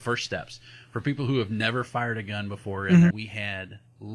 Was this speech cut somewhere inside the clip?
yes; 1 cut; at 3.1 s

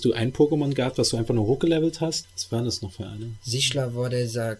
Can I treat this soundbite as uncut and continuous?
no; 1 cut; at 2.2 s

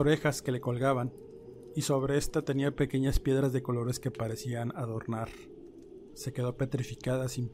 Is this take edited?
yes; 1 cut; at 6.1 s

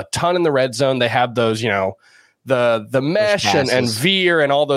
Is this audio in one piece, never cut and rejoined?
yes; 0 cuts

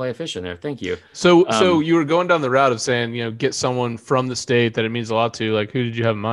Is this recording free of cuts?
yes; 0 cuts

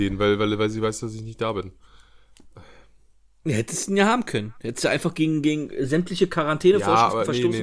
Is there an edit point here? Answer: no; 0 cuts

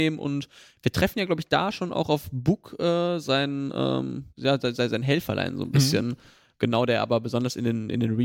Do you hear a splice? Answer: yes; 1 cut; at 4.3 s

